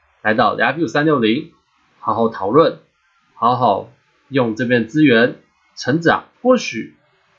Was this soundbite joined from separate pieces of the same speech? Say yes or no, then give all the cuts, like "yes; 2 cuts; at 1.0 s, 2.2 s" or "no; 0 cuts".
yes; 1 cut; at 6.3 s